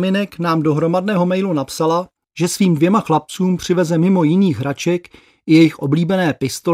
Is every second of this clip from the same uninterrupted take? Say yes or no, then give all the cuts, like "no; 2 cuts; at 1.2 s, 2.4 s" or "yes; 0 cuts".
yes; 0 cuts